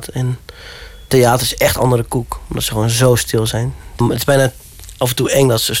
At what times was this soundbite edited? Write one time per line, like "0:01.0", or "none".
0:04.0